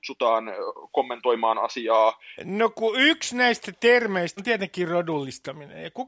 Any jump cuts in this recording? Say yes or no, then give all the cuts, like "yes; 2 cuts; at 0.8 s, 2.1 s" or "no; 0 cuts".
yes; 2 cuts; at 2.4 s, 4.4 s